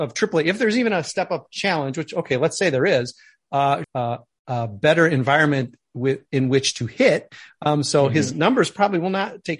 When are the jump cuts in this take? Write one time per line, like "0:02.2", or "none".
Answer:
0:03.8